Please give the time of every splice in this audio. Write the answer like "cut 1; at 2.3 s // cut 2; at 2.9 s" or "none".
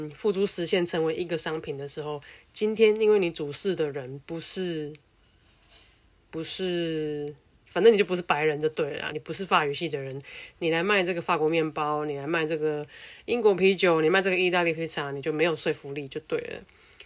cut 1; at 9.1 s